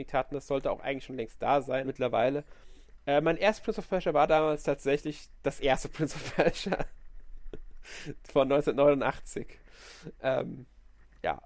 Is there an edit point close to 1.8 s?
yes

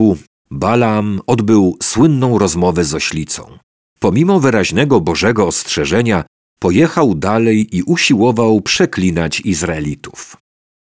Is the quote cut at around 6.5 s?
yes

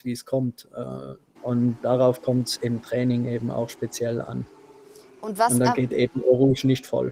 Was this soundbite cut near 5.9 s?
no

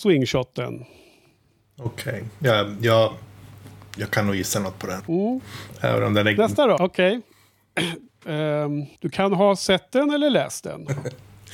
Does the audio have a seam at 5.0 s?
yes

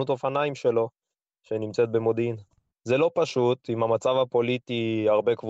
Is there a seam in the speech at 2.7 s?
yes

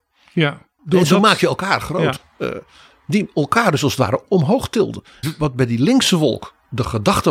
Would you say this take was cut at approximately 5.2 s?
yes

